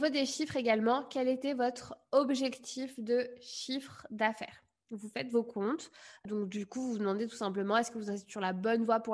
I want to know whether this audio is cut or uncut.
uncut